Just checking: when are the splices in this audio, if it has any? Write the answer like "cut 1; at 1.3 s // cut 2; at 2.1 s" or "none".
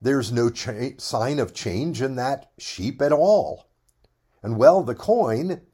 none

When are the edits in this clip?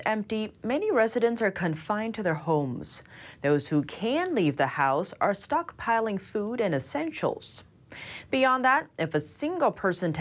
none

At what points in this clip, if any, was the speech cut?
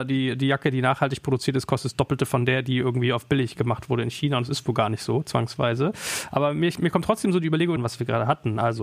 cut 1; at 7.8 s

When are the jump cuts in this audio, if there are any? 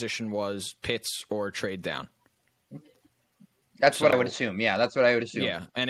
none

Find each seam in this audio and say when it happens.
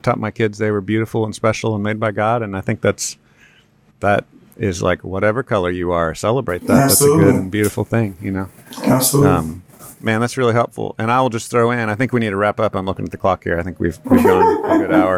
none

